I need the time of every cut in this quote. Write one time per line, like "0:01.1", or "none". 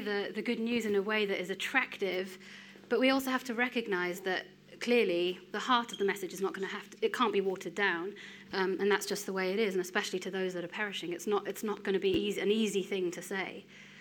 0:05.5
0:08.4